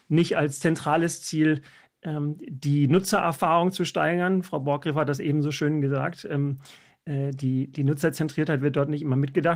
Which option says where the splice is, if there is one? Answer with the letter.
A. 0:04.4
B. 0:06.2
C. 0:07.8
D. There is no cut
D